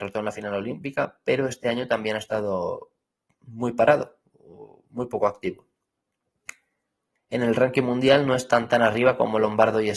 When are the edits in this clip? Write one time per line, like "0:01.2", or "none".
0:07.2